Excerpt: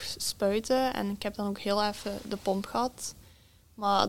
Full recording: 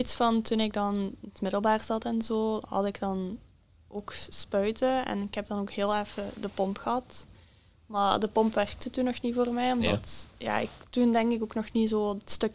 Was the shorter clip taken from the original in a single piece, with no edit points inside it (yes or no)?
yes